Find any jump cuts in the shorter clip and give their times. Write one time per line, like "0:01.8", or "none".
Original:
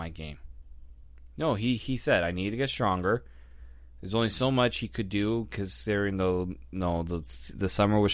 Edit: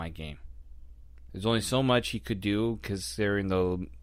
0:01.3